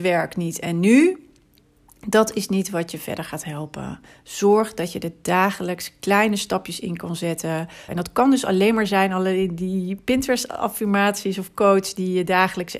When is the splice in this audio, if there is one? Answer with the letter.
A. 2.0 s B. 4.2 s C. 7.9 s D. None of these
C